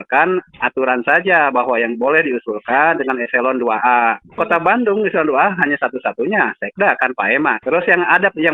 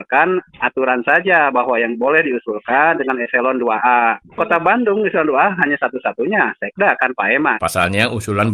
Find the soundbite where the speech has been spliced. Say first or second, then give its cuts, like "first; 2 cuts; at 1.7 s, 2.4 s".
second; 1 cut; at 7.6 s